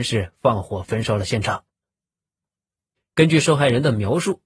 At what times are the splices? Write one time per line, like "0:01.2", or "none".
0:03.0